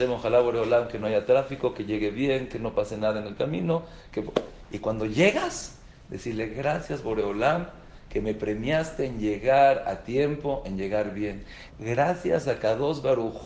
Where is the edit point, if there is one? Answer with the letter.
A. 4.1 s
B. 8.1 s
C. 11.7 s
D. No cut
C